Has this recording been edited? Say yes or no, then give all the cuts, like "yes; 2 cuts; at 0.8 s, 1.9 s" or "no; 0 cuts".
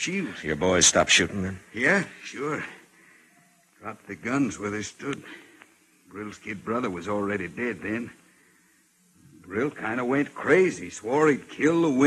no; 0 cuts